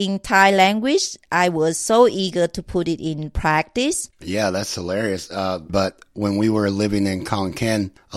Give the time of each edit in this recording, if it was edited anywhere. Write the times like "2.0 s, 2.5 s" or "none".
4.1 s, 5.7 s